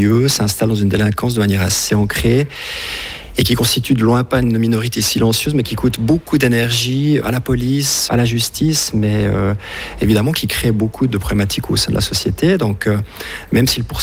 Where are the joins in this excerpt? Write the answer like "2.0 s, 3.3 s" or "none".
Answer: none